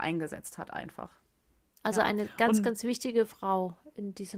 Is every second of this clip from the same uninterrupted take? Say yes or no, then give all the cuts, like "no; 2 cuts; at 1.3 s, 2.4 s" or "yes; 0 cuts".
no; 1 cut; at 1.7 s